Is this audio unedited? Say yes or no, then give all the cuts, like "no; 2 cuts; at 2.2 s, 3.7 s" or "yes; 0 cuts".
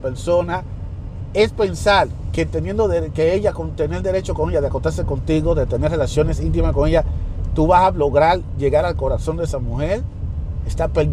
yes; 0 cuts